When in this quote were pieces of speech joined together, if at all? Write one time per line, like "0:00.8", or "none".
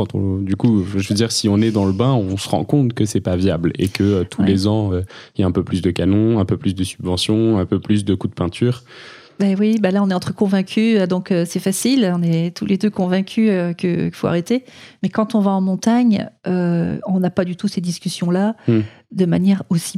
none